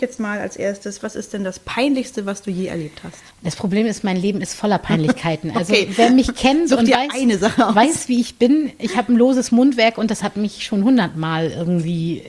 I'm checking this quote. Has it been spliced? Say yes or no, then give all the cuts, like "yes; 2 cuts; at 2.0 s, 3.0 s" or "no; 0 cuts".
yes; 1 cut; at 3.3 s